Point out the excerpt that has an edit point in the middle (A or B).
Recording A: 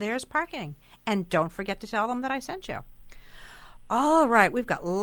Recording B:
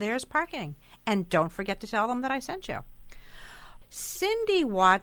B